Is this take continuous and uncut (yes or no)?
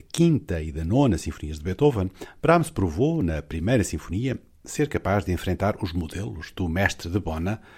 yes